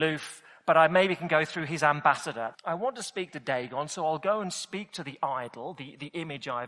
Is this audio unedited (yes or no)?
no